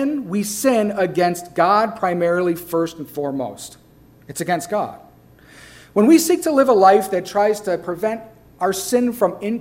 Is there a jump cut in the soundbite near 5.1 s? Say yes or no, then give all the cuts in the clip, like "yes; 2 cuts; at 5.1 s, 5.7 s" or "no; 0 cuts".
no; 0 cuts